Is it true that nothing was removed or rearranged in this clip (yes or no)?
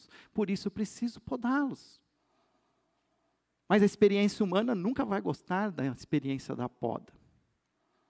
yes